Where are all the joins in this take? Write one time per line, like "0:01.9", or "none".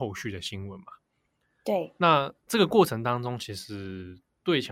none